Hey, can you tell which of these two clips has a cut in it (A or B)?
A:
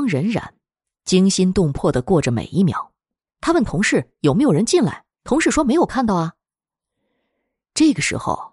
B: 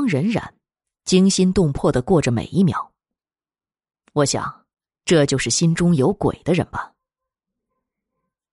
A